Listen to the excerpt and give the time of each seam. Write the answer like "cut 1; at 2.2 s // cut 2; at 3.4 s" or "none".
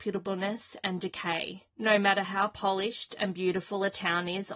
cut 1; at 1.7 s